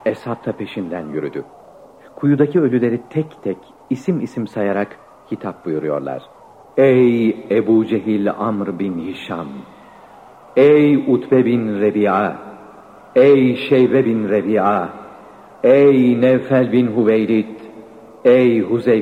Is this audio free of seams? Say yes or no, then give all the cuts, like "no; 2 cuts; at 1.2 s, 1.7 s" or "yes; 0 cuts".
yes; 0 cuts